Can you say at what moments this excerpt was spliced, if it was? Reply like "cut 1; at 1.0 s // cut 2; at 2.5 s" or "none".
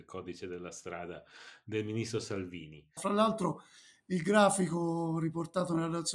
cut 1; at 3.0 s